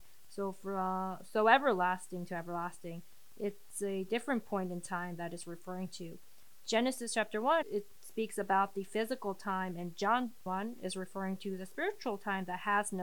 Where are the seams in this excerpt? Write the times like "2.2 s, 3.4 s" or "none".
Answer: 7.6 s, 10.5 s